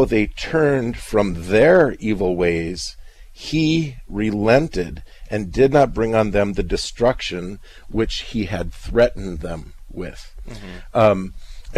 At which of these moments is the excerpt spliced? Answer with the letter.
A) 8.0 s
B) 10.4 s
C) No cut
C